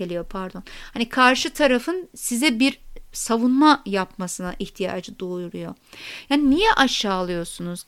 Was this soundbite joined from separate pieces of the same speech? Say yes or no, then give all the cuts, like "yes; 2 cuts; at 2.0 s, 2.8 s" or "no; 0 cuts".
no; 0 cuts